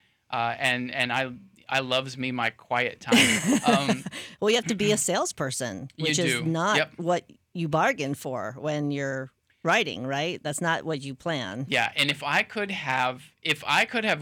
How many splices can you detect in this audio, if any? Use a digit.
0